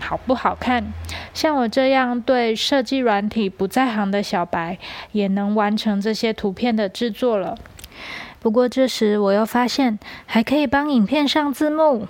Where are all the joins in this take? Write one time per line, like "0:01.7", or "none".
0:08.4